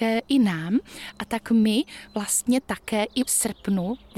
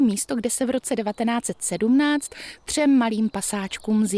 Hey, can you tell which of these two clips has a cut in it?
first; 1 cut; at 3.3 s

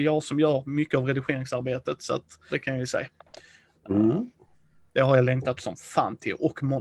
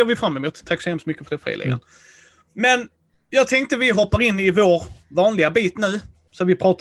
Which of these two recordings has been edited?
first; 2 cuts; at 2.5 s, 4.8 s

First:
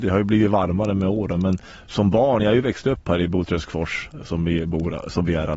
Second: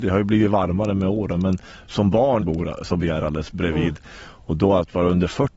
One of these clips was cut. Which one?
second; 1 cut; at 2.4 s

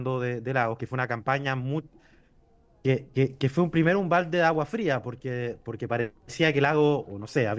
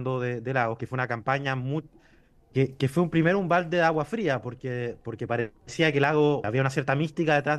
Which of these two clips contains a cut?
second; 2 cuts; at 2.5 s, 6.4 s

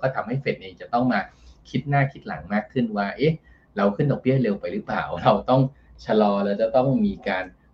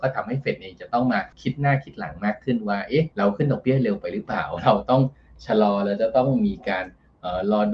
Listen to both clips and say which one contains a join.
second; 2 cuts; at 1.3 s, 3.1 s

